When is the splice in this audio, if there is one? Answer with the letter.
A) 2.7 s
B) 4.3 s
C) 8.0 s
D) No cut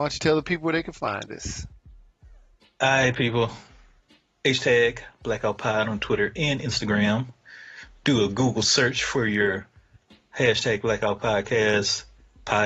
D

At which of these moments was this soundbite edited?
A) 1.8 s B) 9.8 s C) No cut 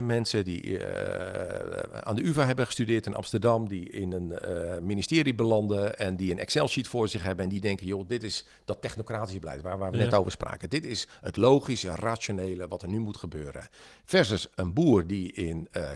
B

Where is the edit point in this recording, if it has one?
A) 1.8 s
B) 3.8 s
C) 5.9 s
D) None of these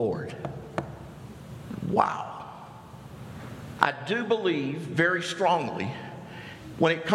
B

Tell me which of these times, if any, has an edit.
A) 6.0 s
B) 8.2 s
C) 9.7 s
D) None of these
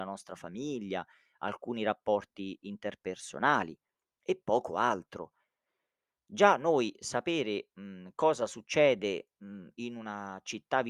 D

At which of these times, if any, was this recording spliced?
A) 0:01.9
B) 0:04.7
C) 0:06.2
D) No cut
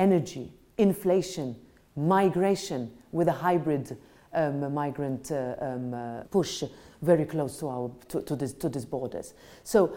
C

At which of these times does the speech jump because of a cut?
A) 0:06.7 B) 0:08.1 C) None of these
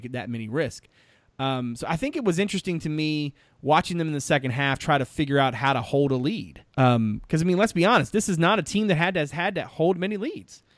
A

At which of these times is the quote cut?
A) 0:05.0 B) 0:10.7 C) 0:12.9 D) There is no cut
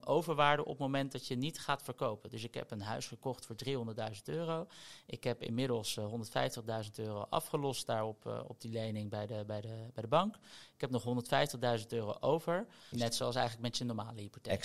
C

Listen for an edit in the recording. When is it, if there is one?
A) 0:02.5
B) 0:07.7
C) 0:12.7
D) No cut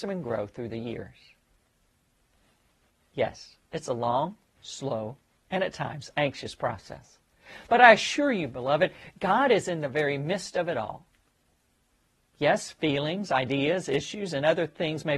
D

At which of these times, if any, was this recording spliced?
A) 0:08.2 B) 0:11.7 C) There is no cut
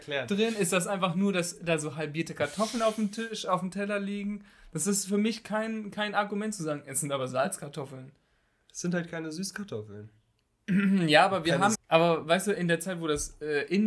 B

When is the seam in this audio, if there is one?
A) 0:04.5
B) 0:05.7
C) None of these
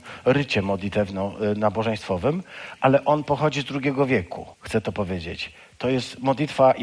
A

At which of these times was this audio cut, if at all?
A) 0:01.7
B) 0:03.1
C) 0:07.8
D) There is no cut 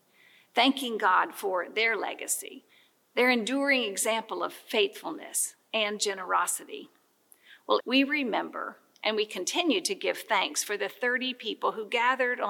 C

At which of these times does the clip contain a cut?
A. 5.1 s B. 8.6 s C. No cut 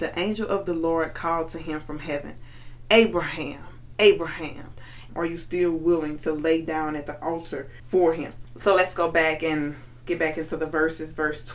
A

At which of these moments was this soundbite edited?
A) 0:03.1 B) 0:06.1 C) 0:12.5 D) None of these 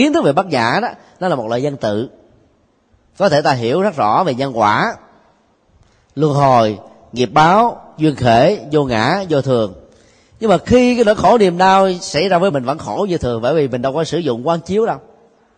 C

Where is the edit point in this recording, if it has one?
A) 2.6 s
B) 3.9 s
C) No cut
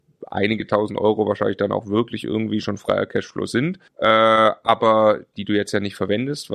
B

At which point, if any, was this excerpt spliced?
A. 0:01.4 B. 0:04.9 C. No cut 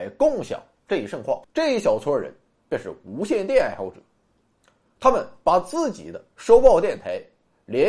A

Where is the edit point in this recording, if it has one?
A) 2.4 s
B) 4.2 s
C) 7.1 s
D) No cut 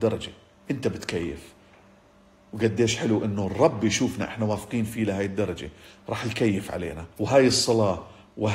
C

